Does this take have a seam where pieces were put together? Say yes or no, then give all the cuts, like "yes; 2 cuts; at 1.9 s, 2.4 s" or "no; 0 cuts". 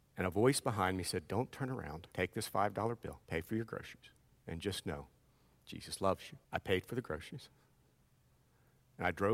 yes; 3 cuts; at 2.1 s, 3.2 s, 6.4 s